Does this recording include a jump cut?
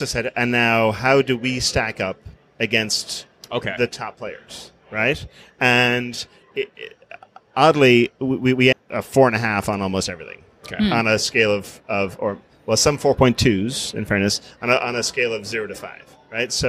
yes; 1 cut; at 8.7 s

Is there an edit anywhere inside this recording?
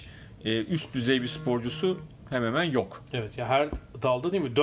no; 0 cuts

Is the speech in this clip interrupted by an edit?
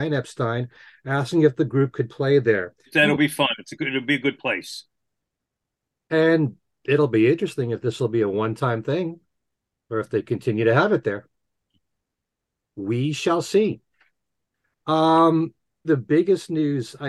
yes; 2 cuts; at 2.9 s, 15.8 s

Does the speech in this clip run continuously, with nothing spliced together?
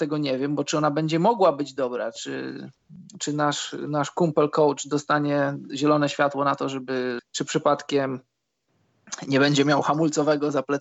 no; 1 cut; at 7.2 s

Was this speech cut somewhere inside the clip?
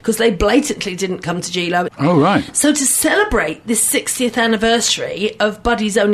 yes; 1 cut; at 1.9 s

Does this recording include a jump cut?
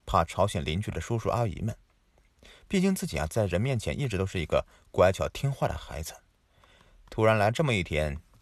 no; 0 cuts

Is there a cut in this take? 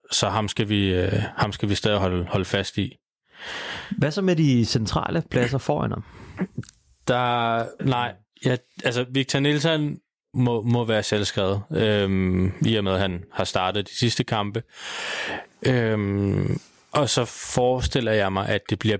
yes; 2 cuts; at 7.8 s, 10.3 s

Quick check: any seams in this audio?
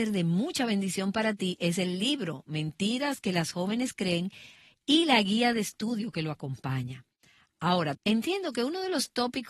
yes; 1 cut; at 7.9 s

